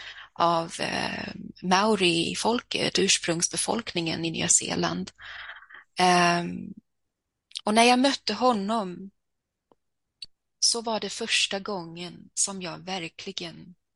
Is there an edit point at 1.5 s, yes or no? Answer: no